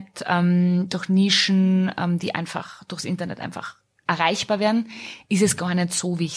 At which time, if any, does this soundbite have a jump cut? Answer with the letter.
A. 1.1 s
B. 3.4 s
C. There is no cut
C